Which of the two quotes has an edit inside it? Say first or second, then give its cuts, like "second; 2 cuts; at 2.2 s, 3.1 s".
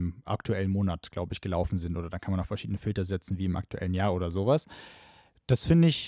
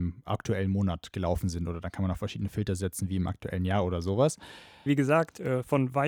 second; 2 cuts; at 1.1 s, 4.9 s